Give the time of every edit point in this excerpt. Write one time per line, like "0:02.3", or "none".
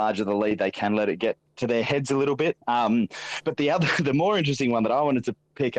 0:02.6